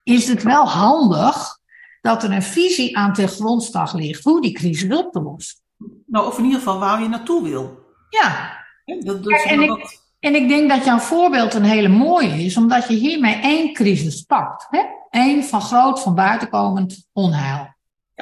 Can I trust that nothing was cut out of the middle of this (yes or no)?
yes